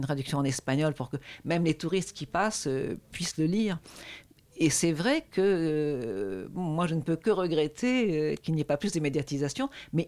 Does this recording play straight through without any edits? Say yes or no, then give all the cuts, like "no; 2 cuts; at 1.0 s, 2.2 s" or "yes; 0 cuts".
yes; 0 cuts